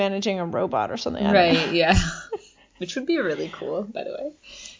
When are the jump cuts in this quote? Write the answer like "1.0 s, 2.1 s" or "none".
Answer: none